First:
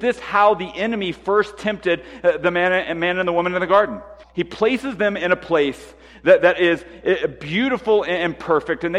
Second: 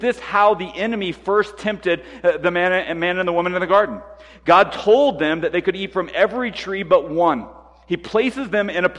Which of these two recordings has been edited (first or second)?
first